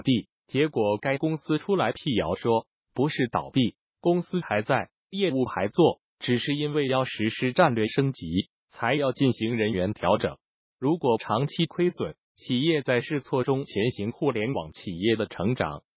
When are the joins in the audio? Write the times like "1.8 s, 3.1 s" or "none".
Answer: 10.7 s, 12.2 s